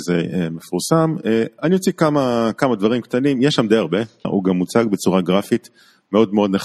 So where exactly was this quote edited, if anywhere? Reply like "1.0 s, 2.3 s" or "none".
4.2 s